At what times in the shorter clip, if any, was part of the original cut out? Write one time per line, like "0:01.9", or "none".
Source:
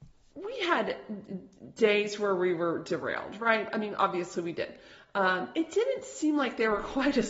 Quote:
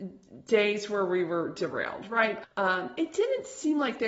0:02.4